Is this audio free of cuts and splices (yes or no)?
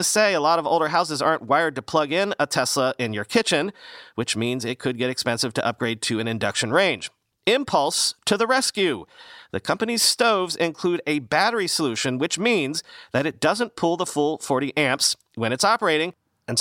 yes